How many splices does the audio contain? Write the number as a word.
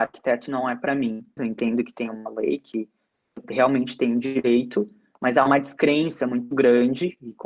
one